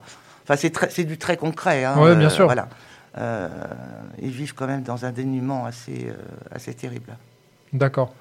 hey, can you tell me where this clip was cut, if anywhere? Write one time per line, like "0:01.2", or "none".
none